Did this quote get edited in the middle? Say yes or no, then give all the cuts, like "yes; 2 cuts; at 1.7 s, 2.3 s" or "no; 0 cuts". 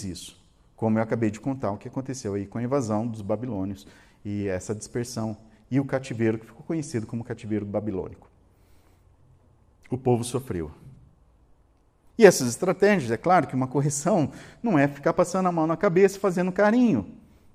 yes; 1 cut; at 12.1 s